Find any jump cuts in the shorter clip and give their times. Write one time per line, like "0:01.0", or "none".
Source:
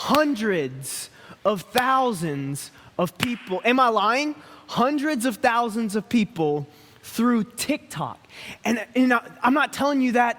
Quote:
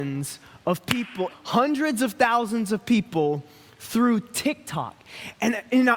0:01.3